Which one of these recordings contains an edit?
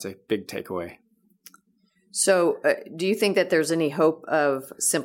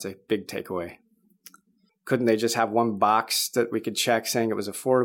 second; 1 cut; at 1.9 s

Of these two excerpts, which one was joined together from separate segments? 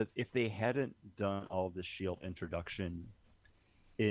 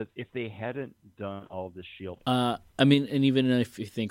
second; 1 cut; at 2.2 s

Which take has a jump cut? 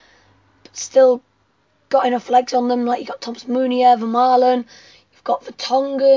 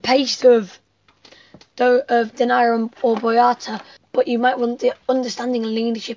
second; 1 cut; at 4.0 s

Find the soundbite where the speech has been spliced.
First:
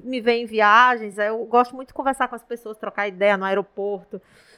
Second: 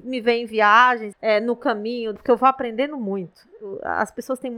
second; 2 cuts; at 1.1 s, 2.2 s

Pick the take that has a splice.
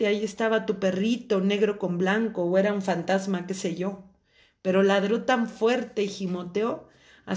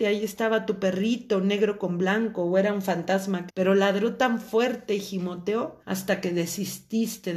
second; 2 cuts; at 3.5 s, 5.8 s

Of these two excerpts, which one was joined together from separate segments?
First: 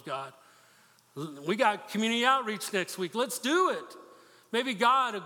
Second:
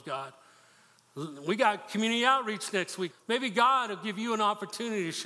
second; 1 cut; at 3.1 s

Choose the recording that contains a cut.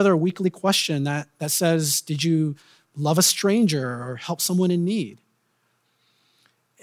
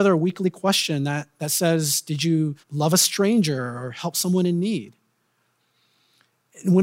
second; 1 cut; at 2.6 s

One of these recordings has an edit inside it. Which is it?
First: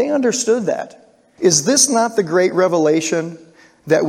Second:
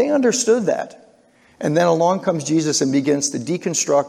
first; 1 cut; at 1.4 s

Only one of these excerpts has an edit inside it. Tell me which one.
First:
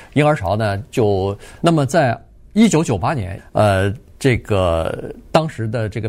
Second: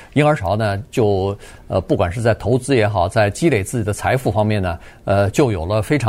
first; 2 cuts; at 1.6 s, 3.4 s

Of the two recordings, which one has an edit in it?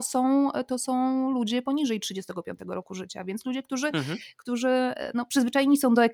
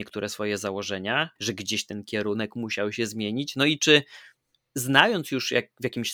second; 1 cut; at 1.4 s

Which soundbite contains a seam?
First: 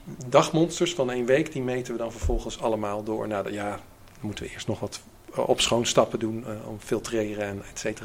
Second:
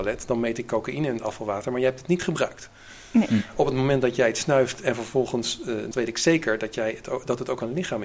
second; 1 cut; at 5.9 s

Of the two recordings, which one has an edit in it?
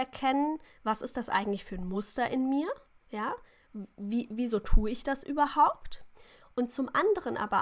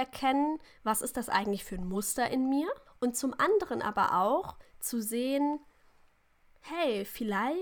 second; 1 cut; at 2.9 s

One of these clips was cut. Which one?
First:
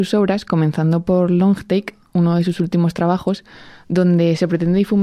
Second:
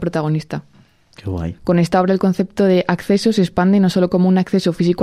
second; 1 cut; at 1.6 s

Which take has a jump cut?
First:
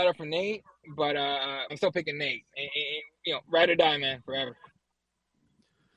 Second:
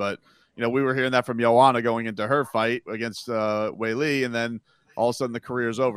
first; 1 cut; at 1.7 s

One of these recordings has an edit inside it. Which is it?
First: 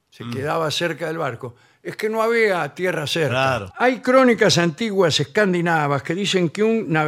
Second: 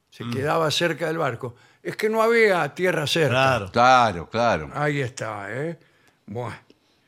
first; 1 cut; at 3.7 s

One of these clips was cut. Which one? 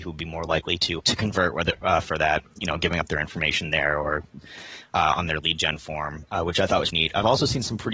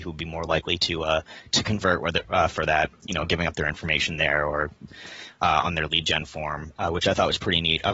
first; 2 cuts; at 1.0 s, 6.9 s

